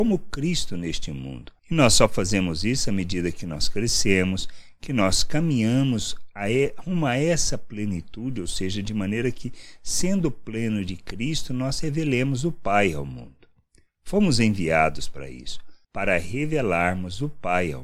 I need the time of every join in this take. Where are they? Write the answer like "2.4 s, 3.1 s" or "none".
none